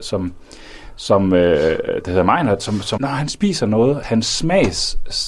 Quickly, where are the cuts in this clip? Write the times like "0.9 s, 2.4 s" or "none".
3.0 s, 4.0 s